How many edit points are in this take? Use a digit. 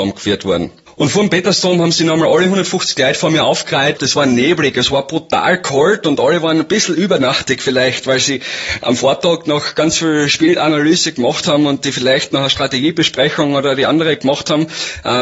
1